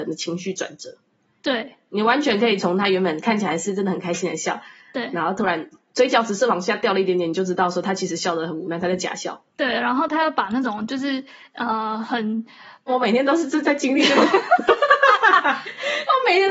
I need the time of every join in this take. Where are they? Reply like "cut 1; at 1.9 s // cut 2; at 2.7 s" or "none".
cut 1; at 9.5 s // cut 2; at 12.9 s